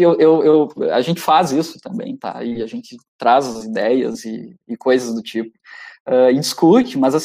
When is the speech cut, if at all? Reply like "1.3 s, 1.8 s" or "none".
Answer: none